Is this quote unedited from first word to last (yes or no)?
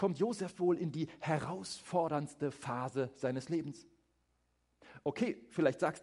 yes